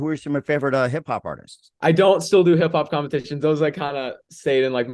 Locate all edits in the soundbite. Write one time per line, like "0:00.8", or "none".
0:01.8